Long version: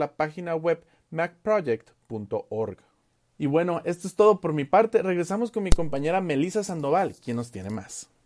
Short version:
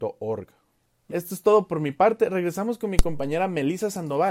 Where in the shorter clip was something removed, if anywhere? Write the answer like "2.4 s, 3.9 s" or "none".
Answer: 1.1 s